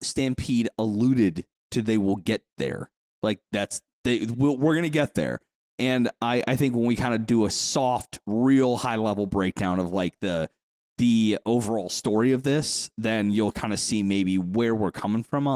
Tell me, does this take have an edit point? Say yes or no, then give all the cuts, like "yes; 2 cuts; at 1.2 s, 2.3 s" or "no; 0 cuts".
no; 0 cuts